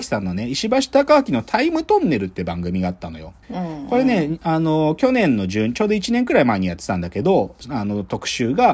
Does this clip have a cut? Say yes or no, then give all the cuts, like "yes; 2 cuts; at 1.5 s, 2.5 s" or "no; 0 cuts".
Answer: yes; 2 cuts; at 3.4 s, 7.6 s